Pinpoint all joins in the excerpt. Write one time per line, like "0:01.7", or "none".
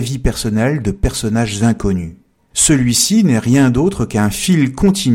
0:02.5